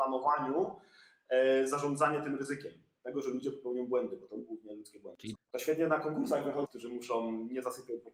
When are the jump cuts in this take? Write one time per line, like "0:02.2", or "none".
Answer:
0:05.3
0:06.7